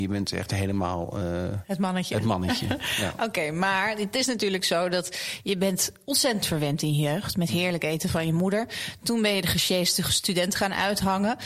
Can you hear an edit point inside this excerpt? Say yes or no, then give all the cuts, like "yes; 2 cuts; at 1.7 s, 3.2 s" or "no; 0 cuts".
no; 0 cuts